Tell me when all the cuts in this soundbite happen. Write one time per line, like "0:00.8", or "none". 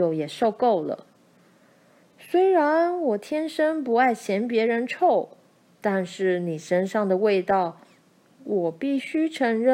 0:05.7